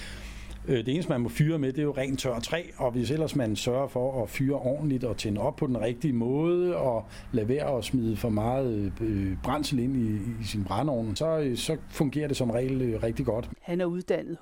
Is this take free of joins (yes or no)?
no